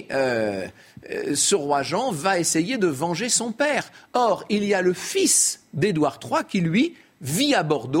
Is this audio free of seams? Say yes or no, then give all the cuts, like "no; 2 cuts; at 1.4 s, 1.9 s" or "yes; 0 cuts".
yes; 0 cuts